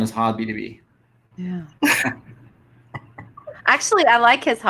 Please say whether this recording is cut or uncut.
cut